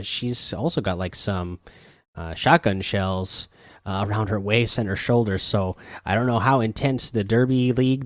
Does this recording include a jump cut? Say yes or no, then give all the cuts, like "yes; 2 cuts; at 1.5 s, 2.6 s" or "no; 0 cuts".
no; 0 cuts